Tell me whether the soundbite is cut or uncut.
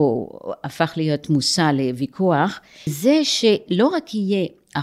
cut